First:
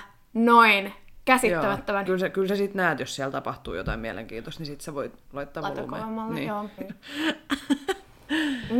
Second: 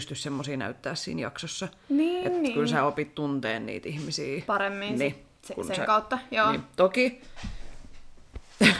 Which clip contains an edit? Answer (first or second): first